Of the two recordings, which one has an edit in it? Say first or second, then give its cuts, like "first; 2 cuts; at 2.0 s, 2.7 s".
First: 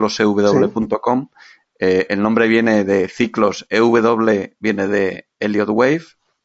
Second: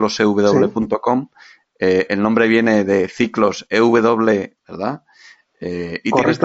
second; 1 cut; at 4.6 s